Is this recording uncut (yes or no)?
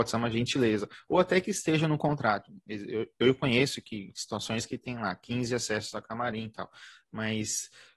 yes